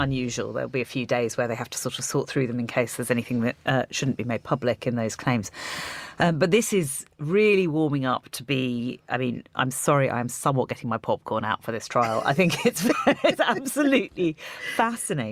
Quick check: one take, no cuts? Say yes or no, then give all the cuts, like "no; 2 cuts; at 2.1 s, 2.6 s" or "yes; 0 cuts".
yes; 0 cuts